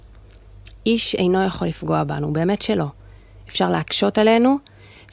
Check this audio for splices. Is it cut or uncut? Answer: uncut